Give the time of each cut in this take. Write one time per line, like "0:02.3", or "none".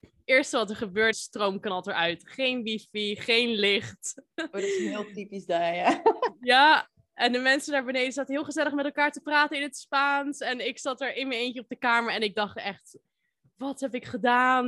0:01.1